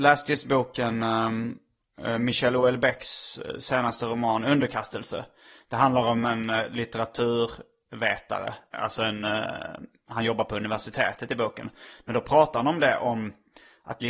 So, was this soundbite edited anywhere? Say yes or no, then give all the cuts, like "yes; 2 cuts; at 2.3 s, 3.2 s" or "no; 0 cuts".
no; 0 cuts